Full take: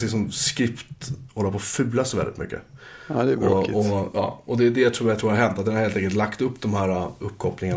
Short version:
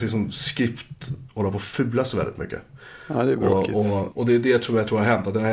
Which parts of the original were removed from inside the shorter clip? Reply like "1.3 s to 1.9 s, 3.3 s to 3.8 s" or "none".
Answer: 4.1 s to 4.4 s